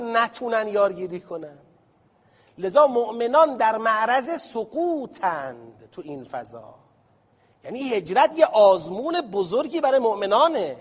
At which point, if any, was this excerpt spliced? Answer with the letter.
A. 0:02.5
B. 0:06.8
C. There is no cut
C